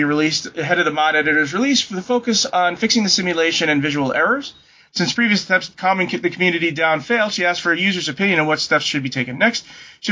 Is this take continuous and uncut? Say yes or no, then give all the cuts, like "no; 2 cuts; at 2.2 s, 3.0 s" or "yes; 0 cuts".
no; 1 cut; at 4.9 s